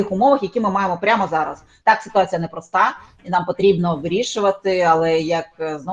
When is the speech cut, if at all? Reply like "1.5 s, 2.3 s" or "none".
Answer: 1.8 s